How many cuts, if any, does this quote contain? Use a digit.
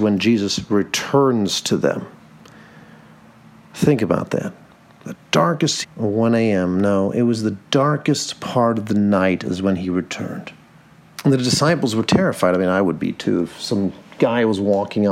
2